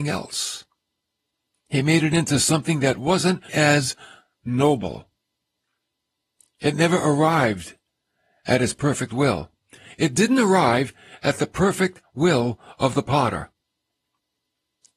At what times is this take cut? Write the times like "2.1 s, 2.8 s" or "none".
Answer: 3.5 s